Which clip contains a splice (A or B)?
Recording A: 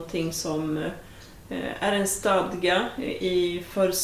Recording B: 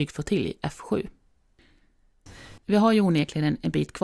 B